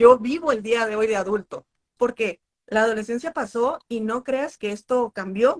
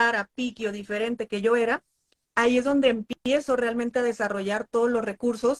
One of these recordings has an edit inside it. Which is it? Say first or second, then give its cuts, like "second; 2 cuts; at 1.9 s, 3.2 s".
first; 2 cuts; at 2.0 s, 4.6 s